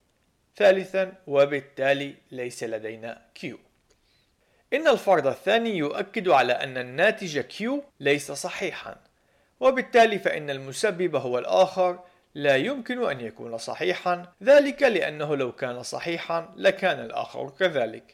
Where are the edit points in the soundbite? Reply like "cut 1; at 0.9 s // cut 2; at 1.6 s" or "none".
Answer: cut 1; at 7.9 s // cut 2; at 14.3 s

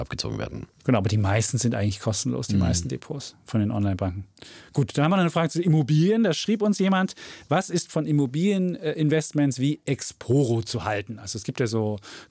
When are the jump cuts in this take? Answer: none

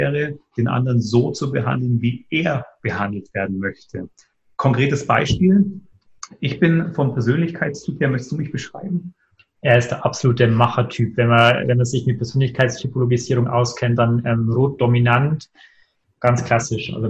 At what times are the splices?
none

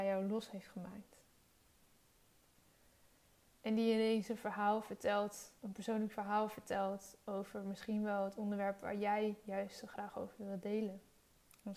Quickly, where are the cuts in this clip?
cut 1; at 3.5 s // cut 2; at 5.6 s

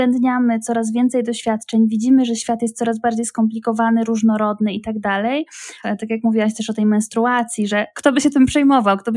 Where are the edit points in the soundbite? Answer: cut 1; at 5.8 s

